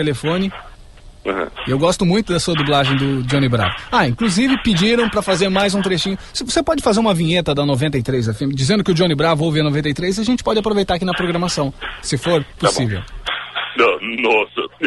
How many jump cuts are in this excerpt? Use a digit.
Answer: 0